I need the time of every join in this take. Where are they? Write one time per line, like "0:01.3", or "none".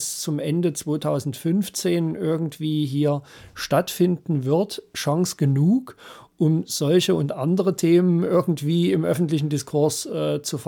none